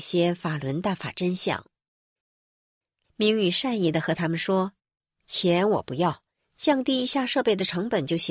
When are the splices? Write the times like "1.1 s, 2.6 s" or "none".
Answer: 3.0 s, 4.8 s